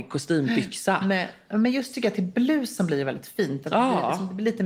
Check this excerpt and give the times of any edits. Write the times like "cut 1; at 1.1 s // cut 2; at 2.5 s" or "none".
none